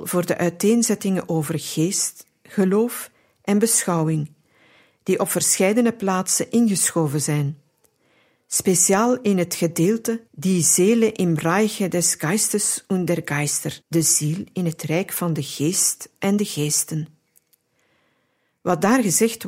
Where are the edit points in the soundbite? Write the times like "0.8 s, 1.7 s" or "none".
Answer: 10.3 s, 13.8 s